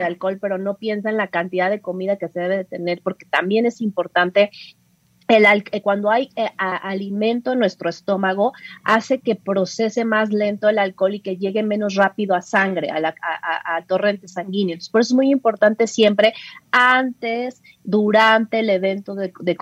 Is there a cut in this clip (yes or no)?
no